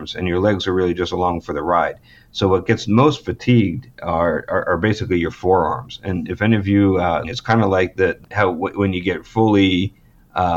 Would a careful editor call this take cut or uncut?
cut